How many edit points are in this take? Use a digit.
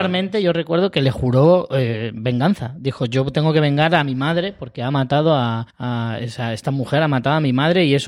1